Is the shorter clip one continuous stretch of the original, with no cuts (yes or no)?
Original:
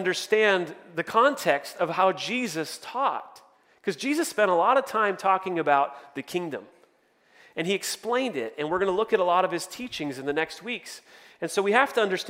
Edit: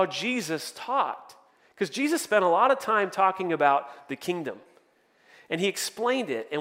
yes